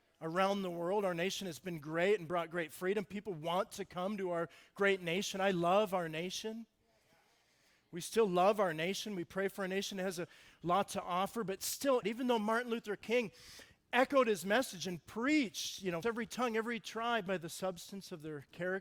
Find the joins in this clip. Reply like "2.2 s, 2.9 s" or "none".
12.0 s, 16.0 s, 17.3 s